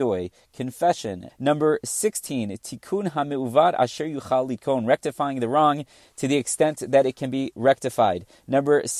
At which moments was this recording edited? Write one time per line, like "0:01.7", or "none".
0:01.3